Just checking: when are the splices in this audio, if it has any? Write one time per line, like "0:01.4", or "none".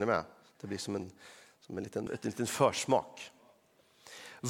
0:02.1